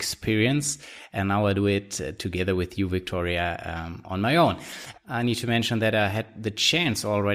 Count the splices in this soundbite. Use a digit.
1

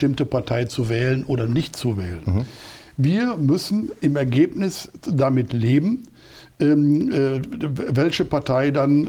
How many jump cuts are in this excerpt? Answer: 0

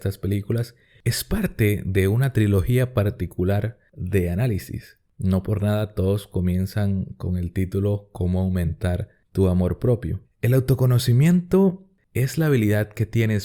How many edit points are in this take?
1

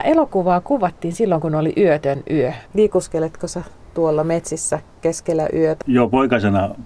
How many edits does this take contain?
2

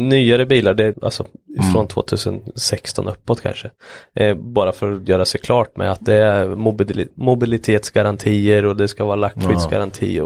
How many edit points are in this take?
1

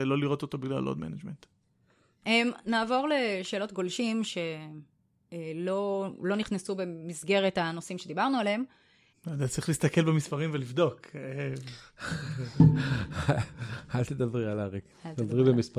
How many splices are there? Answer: 2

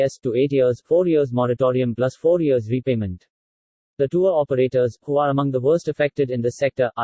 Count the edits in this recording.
0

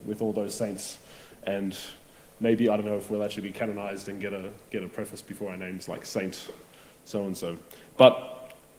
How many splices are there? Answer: 0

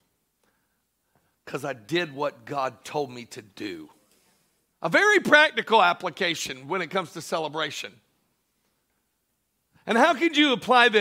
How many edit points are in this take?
1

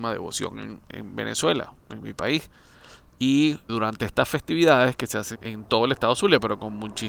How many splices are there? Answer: 2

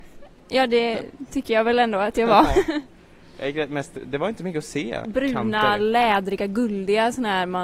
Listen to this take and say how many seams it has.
1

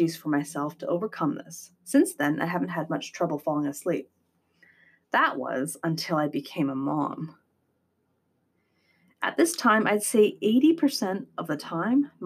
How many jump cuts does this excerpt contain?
0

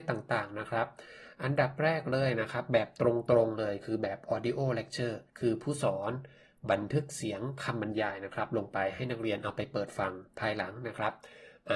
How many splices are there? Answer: 1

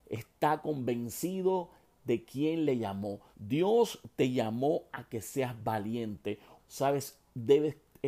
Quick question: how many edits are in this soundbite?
2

